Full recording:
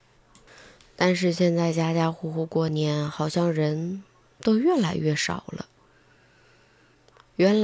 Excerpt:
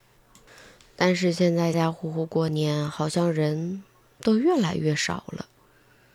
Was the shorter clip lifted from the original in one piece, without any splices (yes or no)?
no